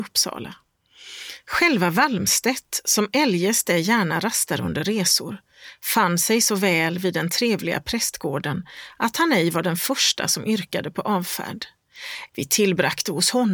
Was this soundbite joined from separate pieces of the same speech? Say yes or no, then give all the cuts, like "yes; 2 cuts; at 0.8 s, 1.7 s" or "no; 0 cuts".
yes; 1 cut; at 12.3 s